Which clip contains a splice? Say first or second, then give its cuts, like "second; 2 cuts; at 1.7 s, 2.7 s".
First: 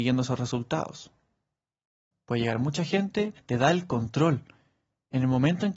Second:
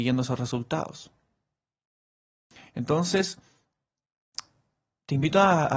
first; 2 cuts; at 2.1 s, 3.4 s